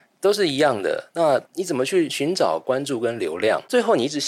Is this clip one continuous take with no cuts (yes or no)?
no